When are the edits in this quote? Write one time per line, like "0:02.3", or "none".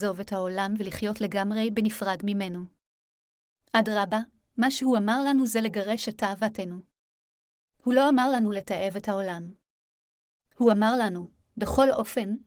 none